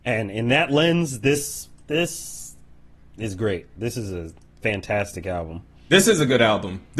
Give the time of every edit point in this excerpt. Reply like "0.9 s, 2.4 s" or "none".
none